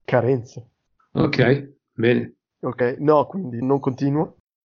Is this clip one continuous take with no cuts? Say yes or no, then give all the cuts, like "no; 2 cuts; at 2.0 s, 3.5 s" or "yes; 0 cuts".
no; 2 cuts; at 2.5 s, 3.6 s